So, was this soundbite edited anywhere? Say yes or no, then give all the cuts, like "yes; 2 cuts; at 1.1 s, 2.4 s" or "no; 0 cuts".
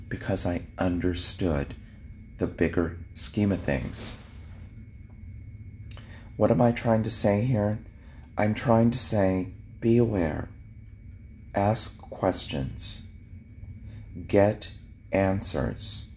no; 0 cuts